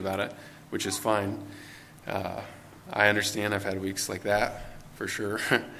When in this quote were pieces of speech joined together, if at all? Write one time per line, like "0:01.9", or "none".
none